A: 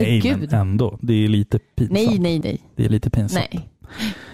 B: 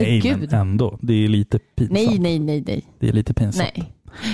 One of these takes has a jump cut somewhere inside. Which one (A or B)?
A